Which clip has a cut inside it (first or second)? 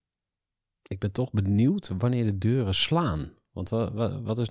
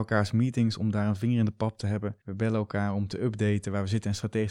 second